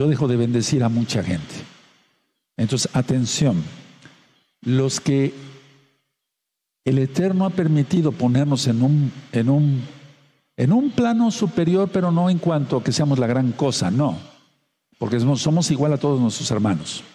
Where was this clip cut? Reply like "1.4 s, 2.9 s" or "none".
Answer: none